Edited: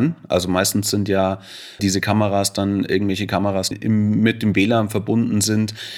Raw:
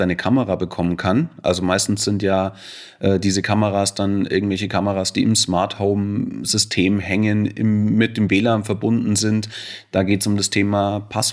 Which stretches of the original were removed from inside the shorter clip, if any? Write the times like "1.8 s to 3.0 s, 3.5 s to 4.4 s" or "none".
2.9 s to 3.2 s, 5.1 s to 7.5 s

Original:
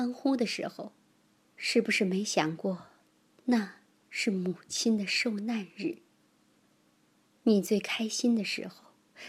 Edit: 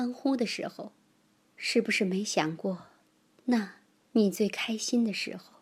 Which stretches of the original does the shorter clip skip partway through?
4.0 s to 7.3 s

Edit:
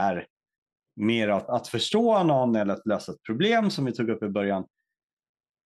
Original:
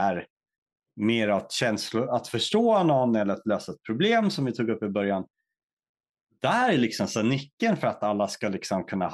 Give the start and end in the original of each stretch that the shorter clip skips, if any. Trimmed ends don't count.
1.5 s to 2.1 s

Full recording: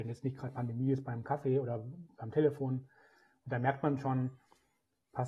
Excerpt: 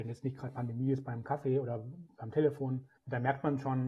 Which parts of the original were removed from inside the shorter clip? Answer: 3.0 s to 3.4 s

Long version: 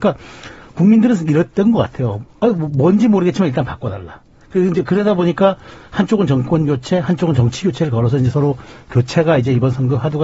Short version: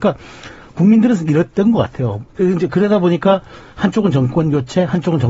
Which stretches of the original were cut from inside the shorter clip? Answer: 2.3 s to 4.4 s

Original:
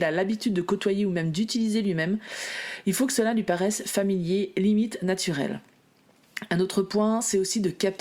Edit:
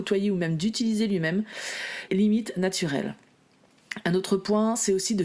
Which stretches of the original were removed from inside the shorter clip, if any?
2.8 s to 4.5 s

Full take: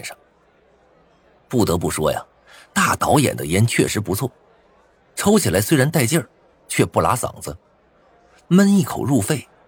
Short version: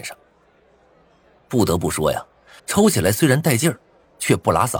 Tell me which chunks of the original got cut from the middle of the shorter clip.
2.6 s to 5.1 s

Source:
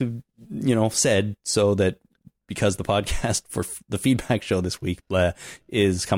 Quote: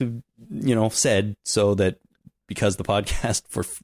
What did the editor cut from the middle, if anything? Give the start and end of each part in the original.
none

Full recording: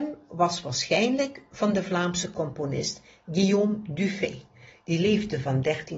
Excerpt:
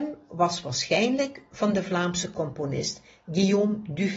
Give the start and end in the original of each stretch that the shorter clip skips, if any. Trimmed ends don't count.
none

